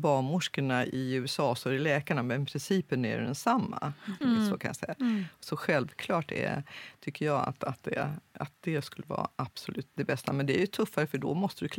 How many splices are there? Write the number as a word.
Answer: two